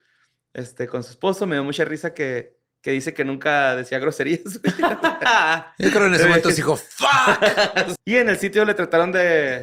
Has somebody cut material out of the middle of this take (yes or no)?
yes